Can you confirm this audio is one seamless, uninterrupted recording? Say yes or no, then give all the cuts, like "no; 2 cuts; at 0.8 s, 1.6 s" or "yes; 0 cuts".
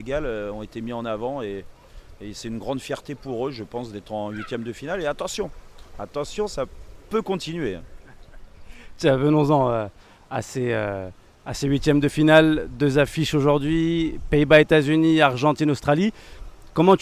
yes; 0 cuts